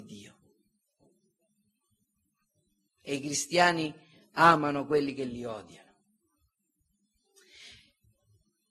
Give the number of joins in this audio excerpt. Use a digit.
1